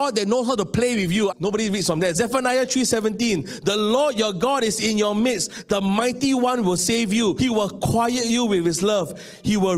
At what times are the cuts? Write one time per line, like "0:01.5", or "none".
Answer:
0:01.3
0:07.4